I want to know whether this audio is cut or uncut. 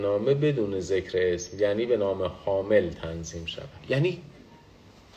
cut